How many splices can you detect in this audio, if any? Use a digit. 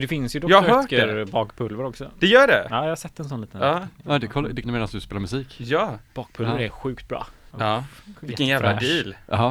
2